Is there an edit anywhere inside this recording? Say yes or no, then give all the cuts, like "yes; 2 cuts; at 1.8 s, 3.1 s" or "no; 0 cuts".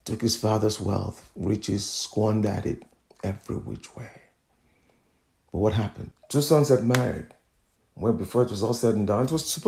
yes; 1 cut; at 6.1 s